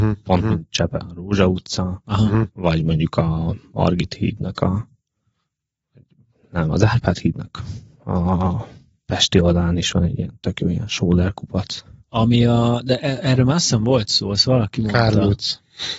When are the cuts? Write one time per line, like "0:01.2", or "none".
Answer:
none